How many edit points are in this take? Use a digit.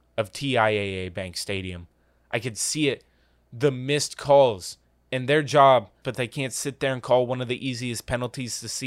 1